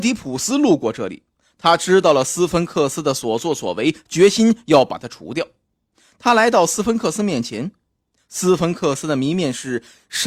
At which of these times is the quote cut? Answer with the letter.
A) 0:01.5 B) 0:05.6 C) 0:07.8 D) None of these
D